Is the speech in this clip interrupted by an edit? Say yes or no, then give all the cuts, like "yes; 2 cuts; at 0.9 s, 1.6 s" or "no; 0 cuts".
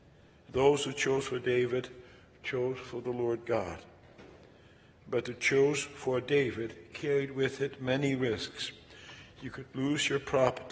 no; 0 cuts